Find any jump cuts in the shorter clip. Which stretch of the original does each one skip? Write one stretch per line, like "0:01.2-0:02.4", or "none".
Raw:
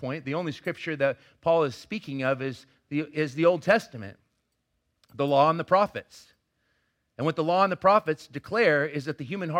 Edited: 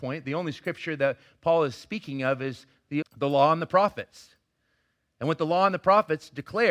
0:03.0-0:05.0